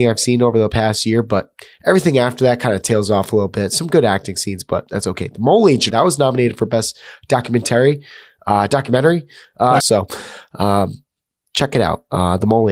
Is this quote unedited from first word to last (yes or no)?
no